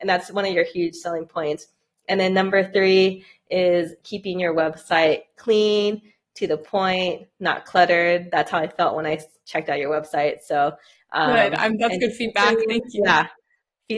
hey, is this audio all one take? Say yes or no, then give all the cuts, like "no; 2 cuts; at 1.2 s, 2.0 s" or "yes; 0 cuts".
yes; 0 cuts